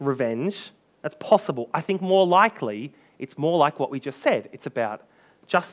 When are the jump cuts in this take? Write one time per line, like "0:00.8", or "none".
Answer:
none